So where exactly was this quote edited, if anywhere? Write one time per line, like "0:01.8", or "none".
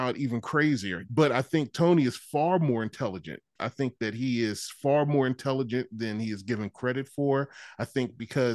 0:01.1
0:03.6

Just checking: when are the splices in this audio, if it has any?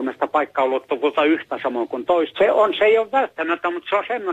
0:02.3

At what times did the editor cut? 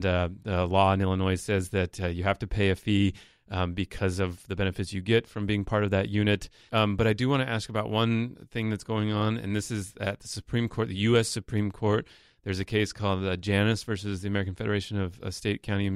0:06.7

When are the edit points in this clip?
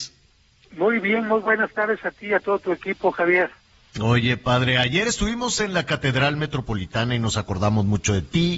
none

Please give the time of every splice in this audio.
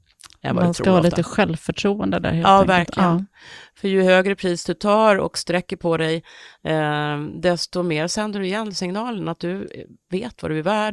none

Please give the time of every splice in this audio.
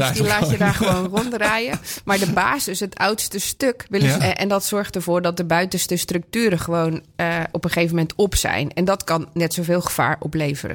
0:04.2

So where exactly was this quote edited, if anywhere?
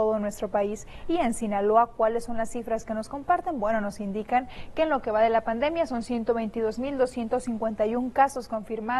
none

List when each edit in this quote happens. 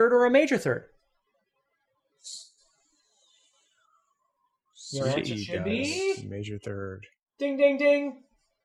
none

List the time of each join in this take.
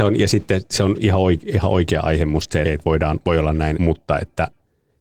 0:02.6
0:03.7

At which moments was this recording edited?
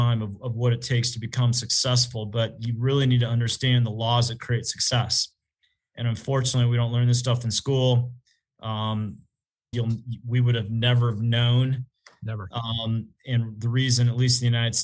0:09.7

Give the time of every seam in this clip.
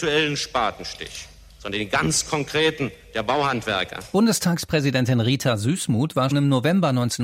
0:06.3

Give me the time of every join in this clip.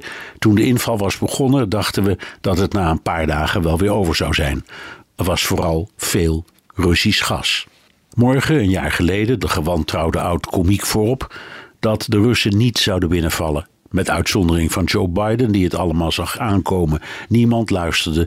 0:05.0
0:09.4

